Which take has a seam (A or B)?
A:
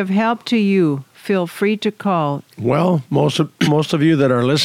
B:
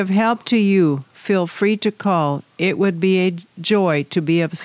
A